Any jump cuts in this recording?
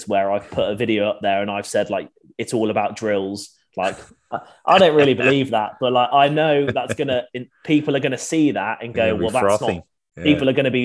no; 0 cuts

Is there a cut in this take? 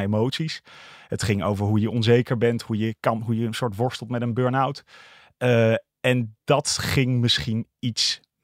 no; 0 cuts

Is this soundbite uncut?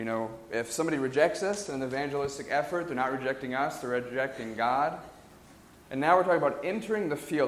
no; 1 cut; at 5.7 s

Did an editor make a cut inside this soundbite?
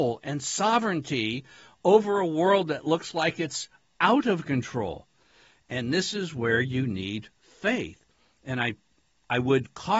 no; 0 cuts

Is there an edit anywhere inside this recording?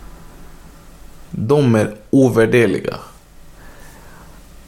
no; 0 cuts

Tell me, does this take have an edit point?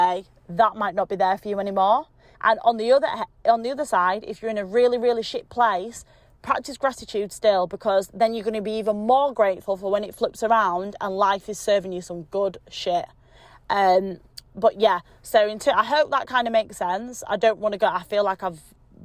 yes; 1 cut; at 2.3 s

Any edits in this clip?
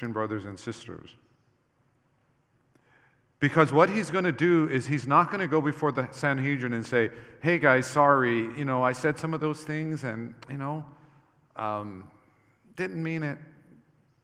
no; 0 cuts

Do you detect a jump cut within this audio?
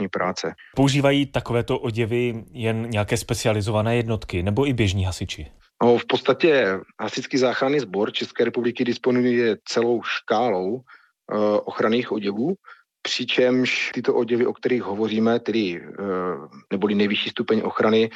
yes; 1 cut; at 16.6 s

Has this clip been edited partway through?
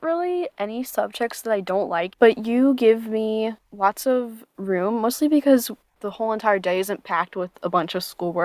yes; 2 cuts; at 2.1 s, 3.6 s

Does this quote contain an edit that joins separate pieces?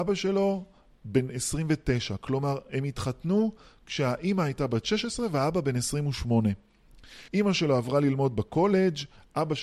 yes; 1 cut; at 7.3 s

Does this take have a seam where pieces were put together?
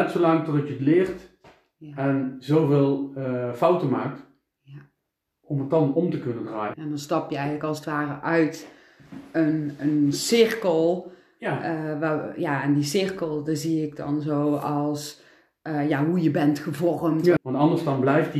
yes; 2 cuts; at 6.7 s, 17.4 s

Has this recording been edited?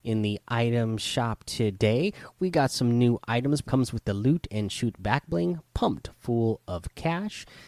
yes; 1 cut; at 3.6 s

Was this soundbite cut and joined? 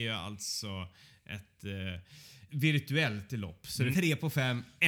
yes; 2 cuts; at 2.5 s, 3.9 s

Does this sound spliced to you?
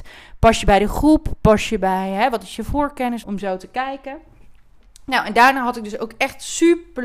yes; 1 cut; at 3.2 s

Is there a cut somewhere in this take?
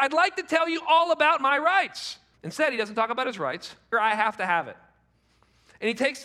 yes; 2 cuts; at 2.3 s, 3.9 s

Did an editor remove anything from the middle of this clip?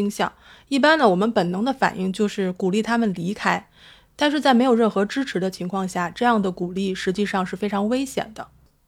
no; 0 cuts

